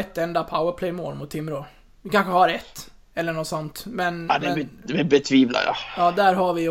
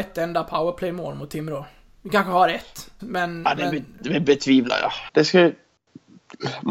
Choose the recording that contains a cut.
second; 2 cuts; at 3.0 s, 5.1 s

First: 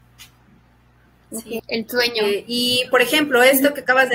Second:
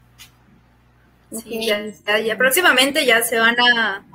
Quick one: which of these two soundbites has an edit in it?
first; 1 cut; at 1.6 s

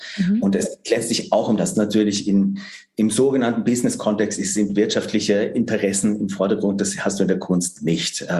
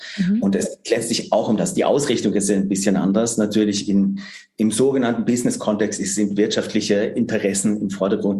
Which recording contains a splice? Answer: first; 1 cut; at 1.7 s

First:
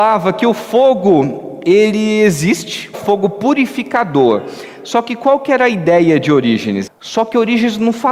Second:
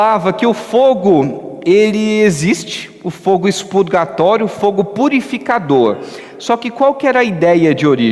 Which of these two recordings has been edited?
first; 2 cuts; at 2.9 s, 6.9 s

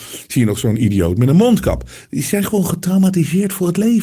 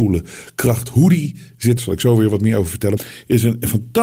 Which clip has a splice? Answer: second; 2 cuts; at 1.8 s, 3.0 s

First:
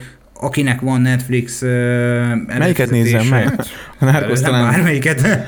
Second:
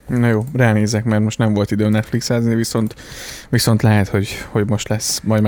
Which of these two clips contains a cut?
first; 1 cut; at 3.4 s

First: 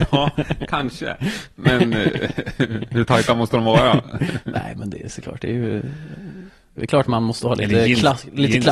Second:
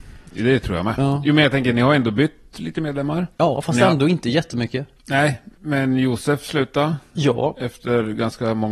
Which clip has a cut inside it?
second; 1 cut; at 3.3 s

